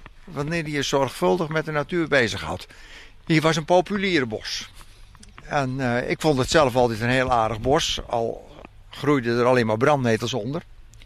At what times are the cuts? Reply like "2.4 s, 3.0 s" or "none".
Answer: 3.1 s

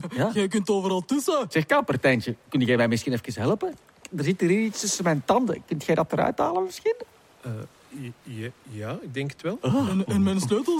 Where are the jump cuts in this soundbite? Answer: none

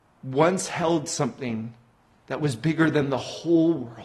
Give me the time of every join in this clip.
none

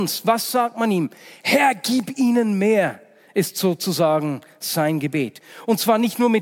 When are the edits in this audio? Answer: 1.4 s

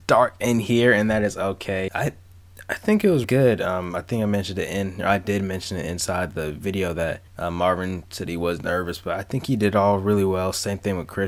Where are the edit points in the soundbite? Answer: 1.9 s, 3.2 s, 7.3 s

